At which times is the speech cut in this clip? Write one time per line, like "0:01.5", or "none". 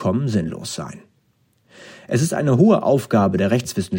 none